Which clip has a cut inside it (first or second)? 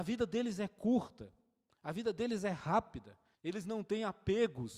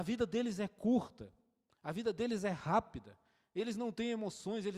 first